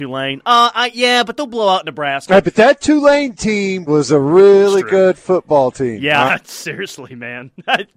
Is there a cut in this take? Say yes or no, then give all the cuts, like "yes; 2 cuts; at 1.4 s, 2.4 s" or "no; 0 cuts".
yes; 2 cuts; at 3.9 s, 6.3 s